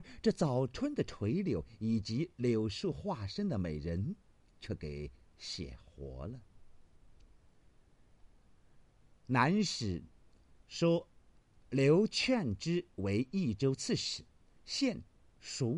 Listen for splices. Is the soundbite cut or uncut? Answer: uncut